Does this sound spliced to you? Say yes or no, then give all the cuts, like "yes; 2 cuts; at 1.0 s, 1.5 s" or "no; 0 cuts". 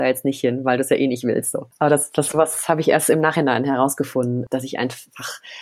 no; 0 cuts